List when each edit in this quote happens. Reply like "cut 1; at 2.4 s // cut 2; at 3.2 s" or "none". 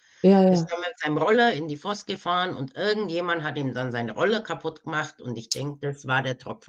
none